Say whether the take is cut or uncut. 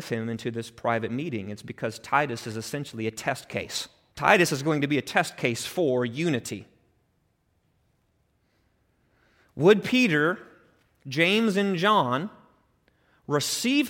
cut